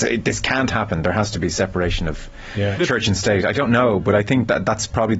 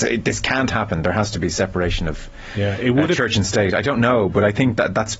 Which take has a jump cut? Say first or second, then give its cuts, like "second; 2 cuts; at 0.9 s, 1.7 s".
first; 1 cut; at 2.8 s